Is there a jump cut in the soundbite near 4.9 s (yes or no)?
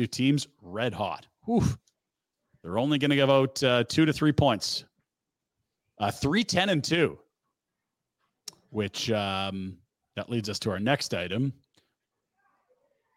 no